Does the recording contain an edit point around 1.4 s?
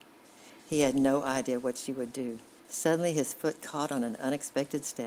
no; 1 cut; at 2.6 s

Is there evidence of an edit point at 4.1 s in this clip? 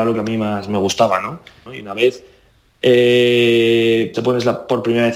yes; 2 cuts; at 1.7 s, 4.1 s

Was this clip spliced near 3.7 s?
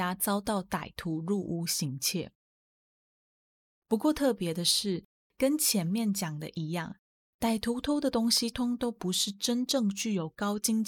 yes; 2 cuts; at 3.7 s, 8.5 s

